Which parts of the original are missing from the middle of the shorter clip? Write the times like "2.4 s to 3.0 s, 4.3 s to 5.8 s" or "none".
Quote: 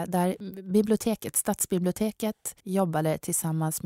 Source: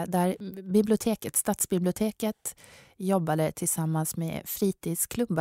2.6 s to 2.9 s